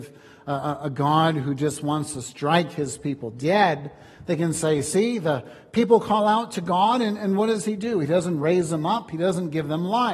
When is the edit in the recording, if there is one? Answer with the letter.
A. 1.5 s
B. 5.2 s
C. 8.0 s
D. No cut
D